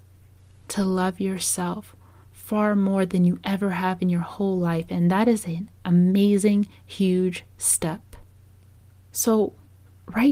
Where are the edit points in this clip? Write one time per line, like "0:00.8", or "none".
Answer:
none